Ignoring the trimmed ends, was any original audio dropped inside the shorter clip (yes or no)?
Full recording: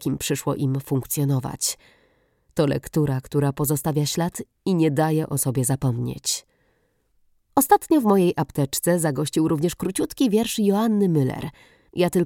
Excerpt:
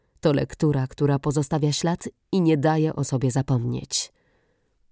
no